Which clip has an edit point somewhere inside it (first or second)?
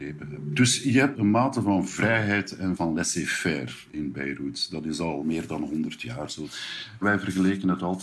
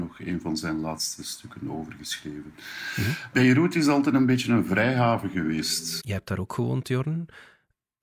second